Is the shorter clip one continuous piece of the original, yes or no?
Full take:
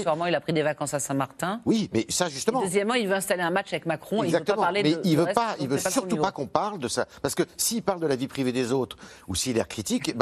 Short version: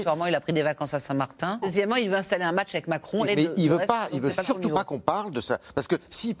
no